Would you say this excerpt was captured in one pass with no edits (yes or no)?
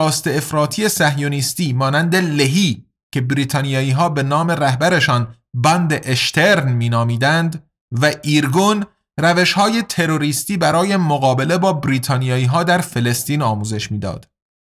yes